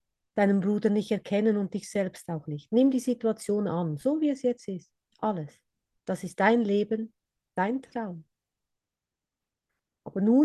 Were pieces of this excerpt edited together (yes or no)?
yes